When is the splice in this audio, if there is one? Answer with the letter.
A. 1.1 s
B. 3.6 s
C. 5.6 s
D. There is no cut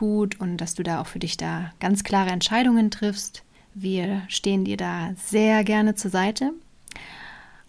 B